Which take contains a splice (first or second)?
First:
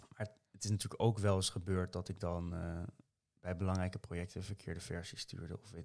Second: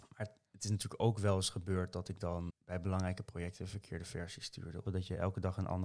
second